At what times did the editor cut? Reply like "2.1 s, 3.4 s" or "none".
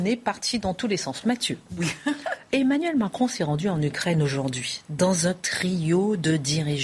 none